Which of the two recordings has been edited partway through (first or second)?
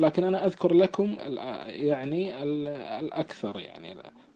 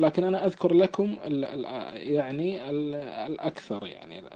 first